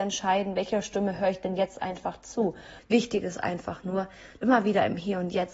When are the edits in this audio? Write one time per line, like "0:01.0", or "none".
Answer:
0:02.8
0:04.4